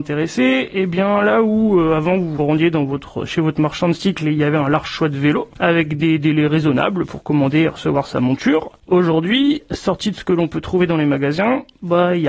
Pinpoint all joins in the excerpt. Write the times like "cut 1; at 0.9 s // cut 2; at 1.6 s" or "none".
none